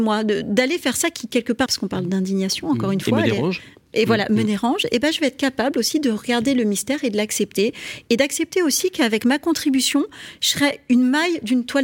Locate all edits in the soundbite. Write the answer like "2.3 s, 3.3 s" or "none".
1.7 s